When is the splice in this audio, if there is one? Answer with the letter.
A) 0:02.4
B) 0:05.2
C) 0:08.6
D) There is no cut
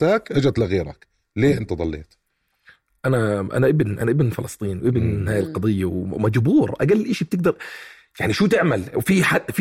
D